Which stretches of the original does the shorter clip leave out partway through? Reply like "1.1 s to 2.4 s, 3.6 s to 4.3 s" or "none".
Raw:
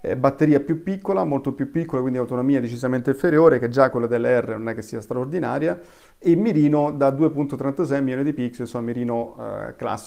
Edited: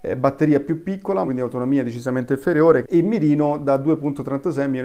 1.3 s to 2.0 s, 3.6 s to 6.2 s